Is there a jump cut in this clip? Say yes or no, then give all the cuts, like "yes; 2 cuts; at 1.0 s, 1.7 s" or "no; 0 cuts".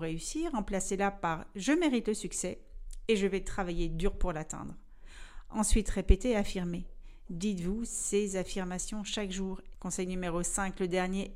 yes; 1 cut; at 9.7 s